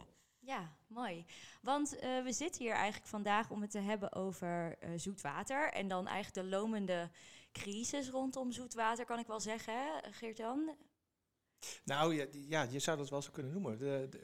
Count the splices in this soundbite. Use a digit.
0